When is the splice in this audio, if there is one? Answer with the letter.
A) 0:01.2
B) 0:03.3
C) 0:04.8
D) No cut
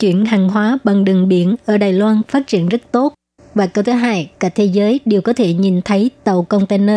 D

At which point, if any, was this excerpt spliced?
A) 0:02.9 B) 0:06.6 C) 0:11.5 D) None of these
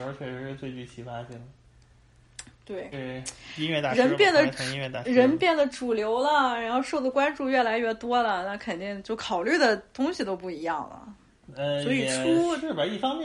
A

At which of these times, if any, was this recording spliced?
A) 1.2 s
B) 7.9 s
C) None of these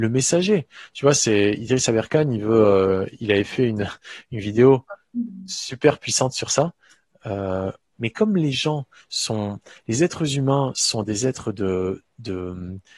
B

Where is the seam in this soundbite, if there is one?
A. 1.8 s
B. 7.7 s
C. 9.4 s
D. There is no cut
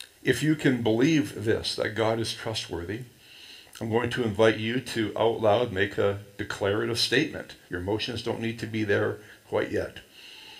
B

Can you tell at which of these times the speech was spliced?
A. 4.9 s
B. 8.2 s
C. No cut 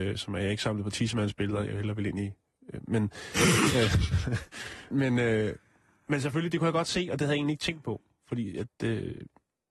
A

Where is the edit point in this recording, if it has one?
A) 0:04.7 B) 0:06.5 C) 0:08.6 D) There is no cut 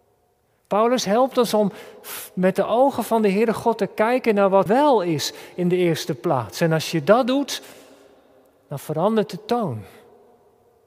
A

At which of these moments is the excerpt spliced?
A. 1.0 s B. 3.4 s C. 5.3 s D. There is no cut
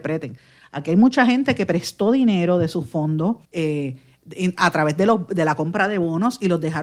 B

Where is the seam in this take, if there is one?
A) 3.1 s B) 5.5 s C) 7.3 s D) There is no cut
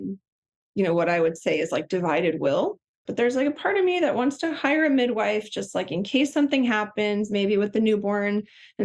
A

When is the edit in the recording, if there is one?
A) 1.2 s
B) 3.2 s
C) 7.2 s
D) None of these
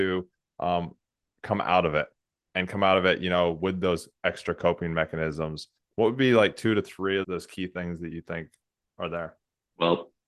C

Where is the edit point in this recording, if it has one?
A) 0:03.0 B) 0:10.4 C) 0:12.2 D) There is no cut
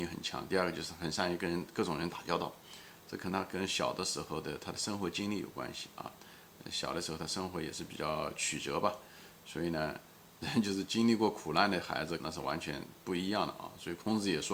C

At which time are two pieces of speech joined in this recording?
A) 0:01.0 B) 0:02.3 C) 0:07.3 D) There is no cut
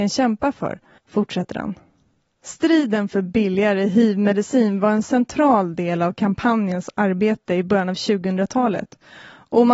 A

